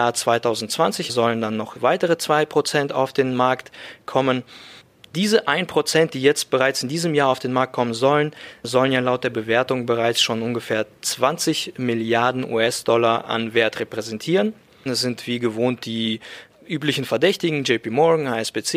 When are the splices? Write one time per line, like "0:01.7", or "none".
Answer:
0:01.1
0:14.9